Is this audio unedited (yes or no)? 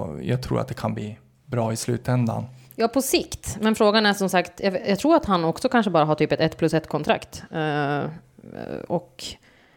yes